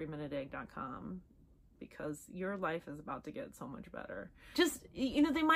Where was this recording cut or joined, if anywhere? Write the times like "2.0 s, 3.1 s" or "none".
none